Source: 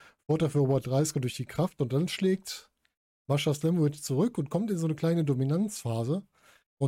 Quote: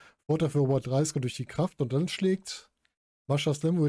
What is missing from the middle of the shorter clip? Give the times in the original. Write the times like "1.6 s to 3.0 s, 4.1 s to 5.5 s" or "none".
none